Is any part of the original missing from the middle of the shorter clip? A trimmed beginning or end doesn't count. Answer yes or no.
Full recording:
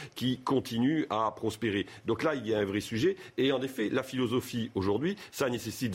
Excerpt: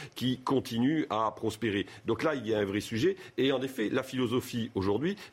no